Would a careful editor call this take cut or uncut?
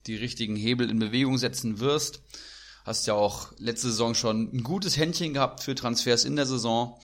uncut